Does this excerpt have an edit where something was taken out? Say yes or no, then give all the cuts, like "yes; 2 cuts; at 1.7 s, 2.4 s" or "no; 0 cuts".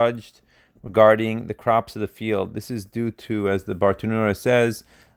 no; 0 cuts